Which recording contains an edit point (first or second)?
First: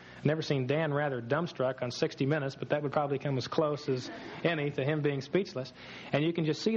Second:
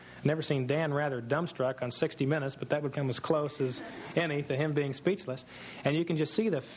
second